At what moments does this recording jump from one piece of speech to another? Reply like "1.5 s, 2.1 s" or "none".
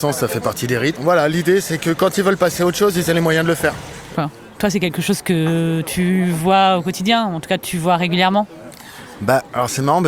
0.9 s, 4.1 s